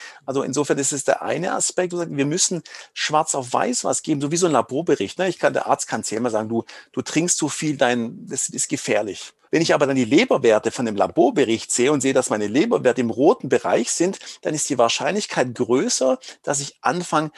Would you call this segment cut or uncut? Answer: cut